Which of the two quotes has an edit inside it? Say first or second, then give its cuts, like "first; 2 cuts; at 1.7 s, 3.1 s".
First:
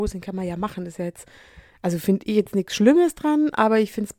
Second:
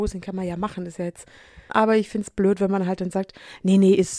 second; 1 cut; at 1.7 s